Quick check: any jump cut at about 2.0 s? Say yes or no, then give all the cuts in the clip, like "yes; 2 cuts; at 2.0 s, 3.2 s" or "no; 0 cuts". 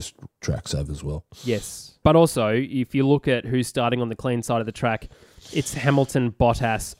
yes; 1 cut; at 2.0 s